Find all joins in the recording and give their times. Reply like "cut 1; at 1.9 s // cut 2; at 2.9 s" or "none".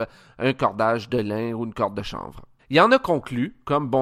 cut 1; at 2.6 s